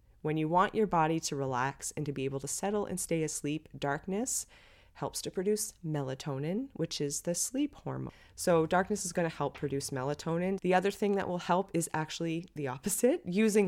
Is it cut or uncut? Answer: cut